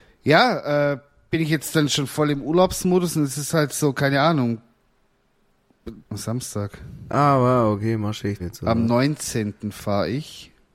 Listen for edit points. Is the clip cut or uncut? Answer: cut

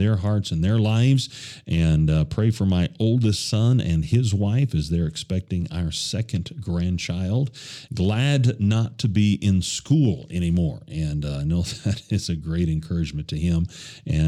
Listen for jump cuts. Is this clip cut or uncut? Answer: cut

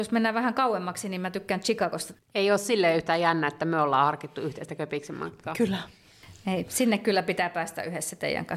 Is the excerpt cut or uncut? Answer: cut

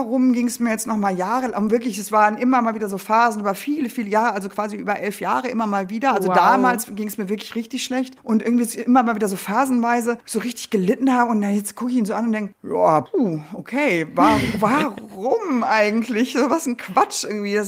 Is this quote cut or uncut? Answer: uncut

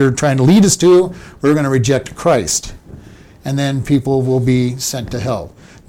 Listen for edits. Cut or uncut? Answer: uncut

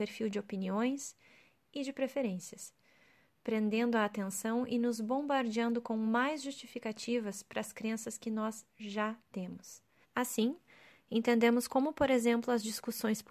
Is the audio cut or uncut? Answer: cut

